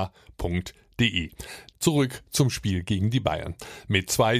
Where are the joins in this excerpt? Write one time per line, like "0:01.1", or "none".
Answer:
0:01.7